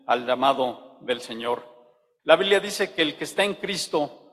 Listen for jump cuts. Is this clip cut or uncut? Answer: cut